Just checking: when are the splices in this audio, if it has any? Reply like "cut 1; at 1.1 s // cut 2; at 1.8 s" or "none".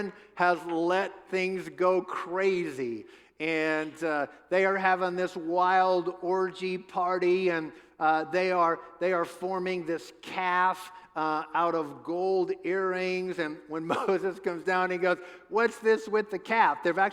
none